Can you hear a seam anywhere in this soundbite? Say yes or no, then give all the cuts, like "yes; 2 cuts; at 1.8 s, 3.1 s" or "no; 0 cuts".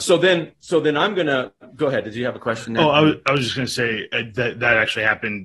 no; 0 cuts